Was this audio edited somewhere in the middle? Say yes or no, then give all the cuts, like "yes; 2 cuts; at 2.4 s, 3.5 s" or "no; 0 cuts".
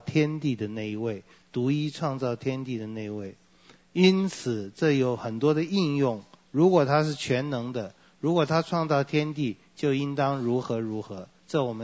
no; 0 cuts